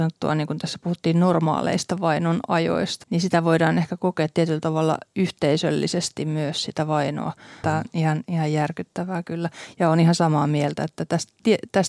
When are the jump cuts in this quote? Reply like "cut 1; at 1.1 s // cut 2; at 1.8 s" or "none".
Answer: cut 1; at 3.0 s // cut 2; at 7.6 s